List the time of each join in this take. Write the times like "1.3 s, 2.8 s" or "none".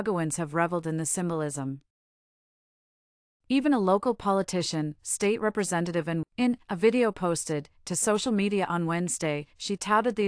6.2 s